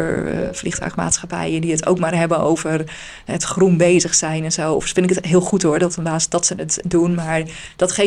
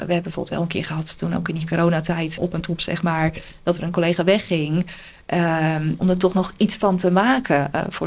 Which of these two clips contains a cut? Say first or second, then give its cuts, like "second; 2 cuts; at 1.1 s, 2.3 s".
second; 2 cuts; at 2.4 s, 6.0 s